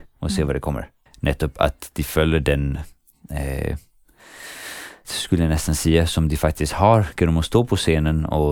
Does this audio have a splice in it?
yes; 2 cuts; at 1.1 s, 5.0 s

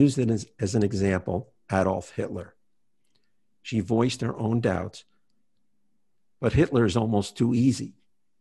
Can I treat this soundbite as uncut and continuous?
yes; 0 cuts

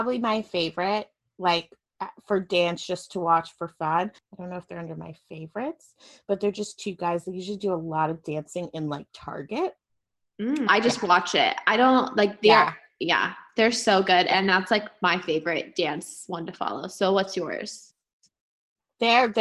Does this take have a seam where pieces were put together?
yes; 1 cut; at 10.7 s

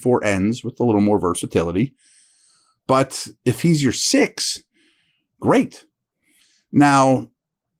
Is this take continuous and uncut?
yes; 0 cuts

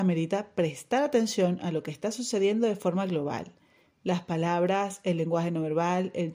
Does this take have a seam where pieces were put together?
no; 0 cuts

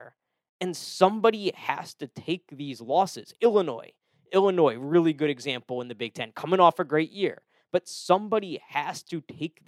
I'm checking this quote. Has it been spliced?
no; 0 cuts

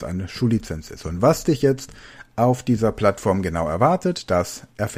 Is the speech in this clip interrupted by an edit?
no; 0 cuts

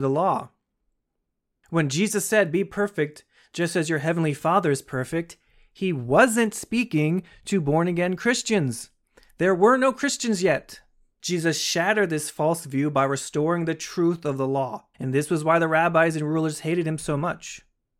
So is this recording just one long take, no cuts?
no; 2 cuts; at 11.2 s, 14.9 s

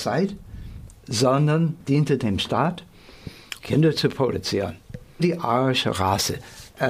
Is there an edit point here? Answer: yes; 2 cuts; at 3.6 s, 5.2 s

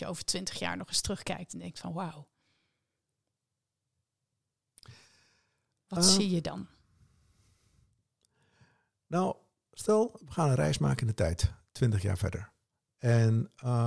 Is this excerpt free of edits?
yes; 0 cuts

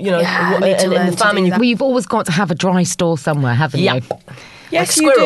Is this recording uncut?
no; 1 cut; at 1.5 s

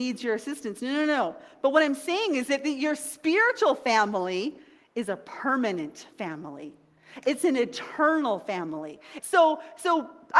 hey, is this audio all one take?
no; 1 cut; at 9.2 s

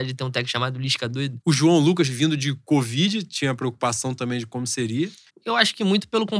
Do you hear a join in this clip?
yes; 2 cuts; at 1.4 s, 5.3 s

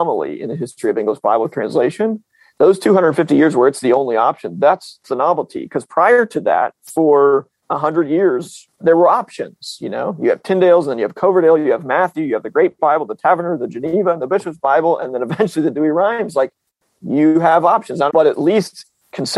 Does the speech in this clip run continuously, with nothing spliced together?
no; 1 cut; at 18.1 s

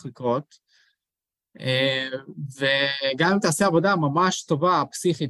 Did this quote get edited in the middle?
no; 0 cuts

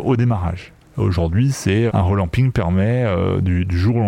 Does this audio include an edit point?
yes; 1 cut; at 1.9 s

